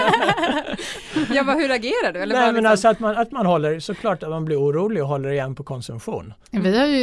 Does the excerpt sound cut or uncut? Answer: uncut